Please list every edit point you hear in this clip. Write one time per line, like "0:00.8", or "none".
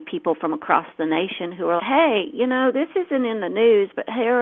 0:01.8